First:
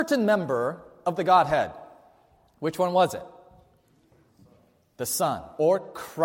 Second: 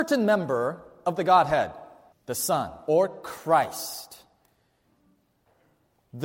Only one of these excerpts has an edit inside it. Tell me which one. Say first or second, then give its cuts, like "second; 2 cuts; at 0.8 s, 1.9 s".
second; 1 cut; at 2.1 s